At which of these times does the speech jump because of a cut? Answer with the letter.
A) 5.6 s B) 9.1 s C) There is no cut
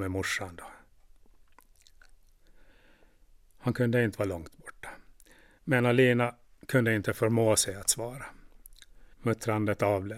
B